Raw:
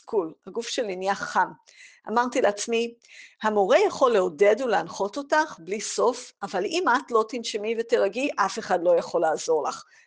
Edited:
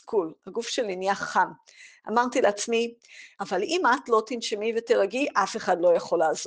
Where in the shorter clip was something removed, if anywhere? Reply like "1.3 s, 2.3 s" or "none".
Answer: 3.3 s